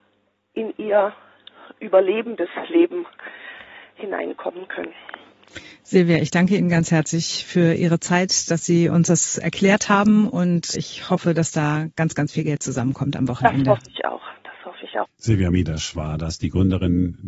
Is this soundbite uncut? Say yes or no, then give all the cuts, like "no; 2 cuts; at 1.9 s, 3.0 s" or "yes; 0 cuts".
no; 2 cuts; at 10.7 s, 15.1 s